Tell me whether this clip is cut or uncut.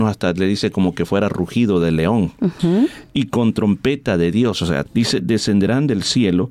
cut